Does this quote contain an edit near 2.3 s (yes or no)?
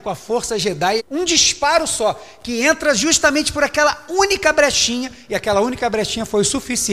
no